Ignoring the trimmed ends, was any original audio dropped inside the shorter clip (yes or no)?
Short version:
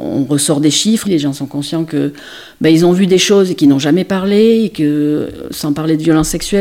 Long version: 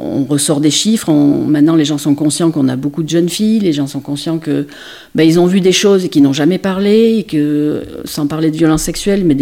yes